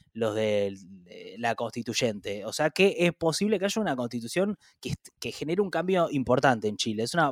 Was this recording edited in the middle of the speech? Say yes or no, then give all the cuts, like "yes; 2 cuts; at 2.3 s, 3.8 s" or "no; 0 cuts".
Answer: no; 0 cuts